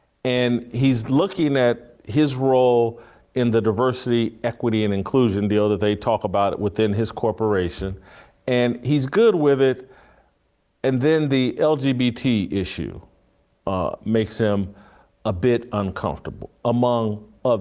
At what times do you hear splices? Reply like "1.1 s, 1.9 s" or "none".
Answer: none